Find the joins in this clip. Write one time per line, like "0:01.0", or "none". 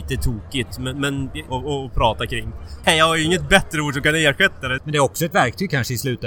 0:01.5
0:02.8
0:04.8

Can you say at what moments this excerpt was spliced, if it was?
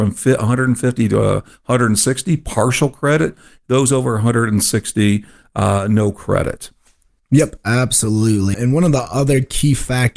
0:08.5

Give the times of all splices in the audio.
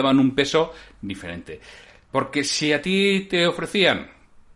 none

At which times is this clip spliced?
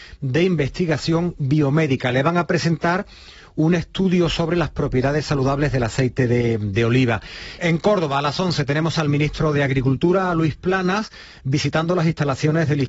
0:07.6

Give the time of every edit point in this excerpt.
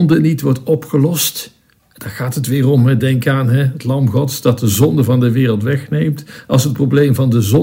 none

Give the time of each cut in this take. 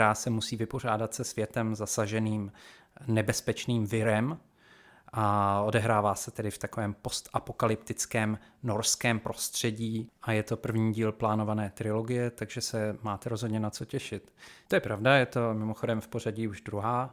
0:14.7

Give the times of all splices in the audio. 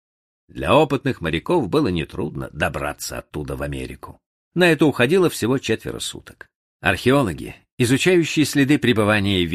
0:06.6

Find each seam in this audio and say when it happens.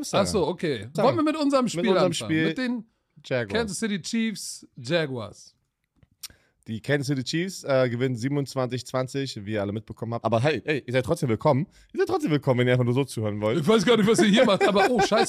0:00.9
0:10.2

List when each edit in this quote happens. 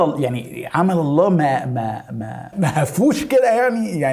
0:02.5

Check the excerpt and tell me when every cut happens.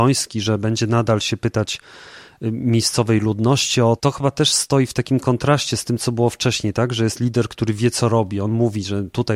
0:04.0

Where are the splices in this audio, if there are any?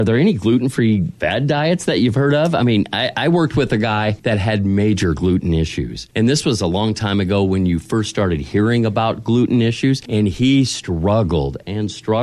none

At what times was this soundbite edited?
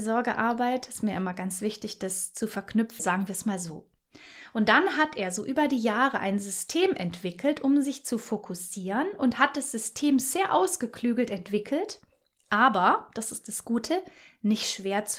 0:03.0

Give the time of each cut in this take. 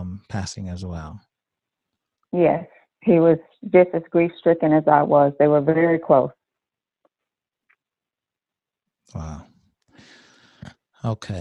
none

